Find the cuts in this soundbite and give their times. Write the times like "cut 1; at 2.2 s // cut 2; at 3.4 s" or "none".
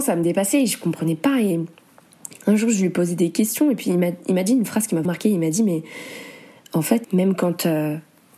cut 1; at 5.0 s // cut 2; at 7.0 s